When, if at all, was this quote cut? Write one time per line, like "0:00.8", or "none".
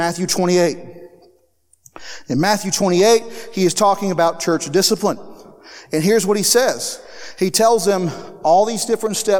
none